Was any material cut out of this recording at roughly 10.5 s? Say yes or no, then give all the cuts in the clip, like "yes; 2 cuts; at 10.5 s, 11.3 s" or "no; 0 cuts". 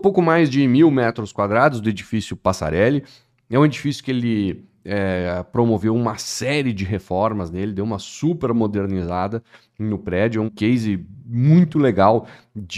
yes; 1 cut; at 10.5 s